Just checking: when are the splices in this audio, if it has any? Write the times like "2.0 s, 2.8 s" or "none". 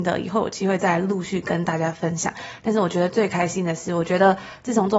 none